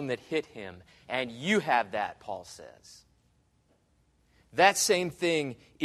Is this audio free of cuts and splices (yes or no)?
yes